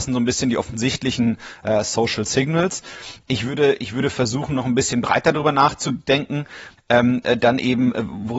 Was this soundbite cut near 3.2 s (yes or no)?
no